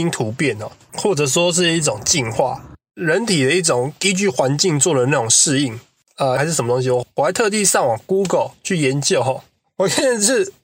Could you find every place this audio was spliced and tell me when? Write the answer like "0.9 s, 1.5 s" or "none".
6.4 s